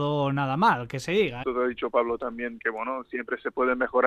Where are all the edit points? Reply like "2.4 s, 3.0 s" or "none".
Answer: 1.4 s, 2.6 s